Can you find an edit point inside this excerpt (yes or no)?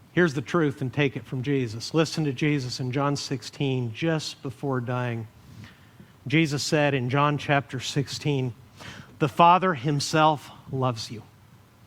no